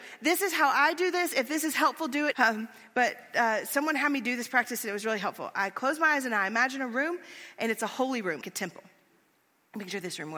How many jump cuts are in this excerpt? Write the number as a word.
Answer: two